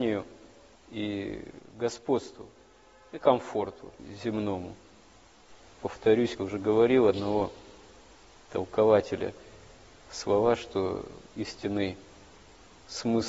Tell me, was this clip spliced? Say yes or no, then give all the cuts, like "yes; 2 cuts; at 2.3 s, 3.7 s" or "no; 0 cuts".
yes; 1 cut; at 6.4 s